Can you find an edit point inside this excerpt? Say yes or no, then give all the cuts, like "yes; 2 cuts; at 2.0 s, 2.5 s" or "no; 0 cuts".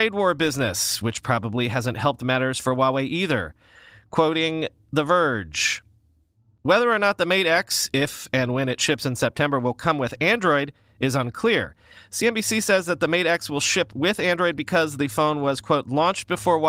no; 0 cuts